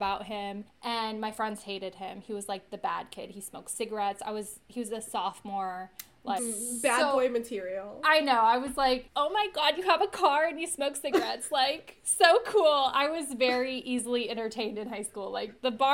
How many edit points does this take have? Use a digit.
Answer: 1